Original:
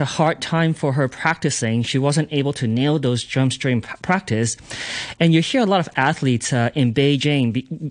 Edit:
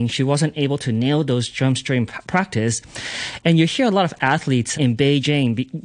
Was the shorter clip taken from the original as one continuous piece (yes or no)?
no